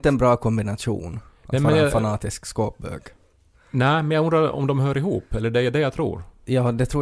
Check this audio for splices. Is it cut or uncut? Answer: uncut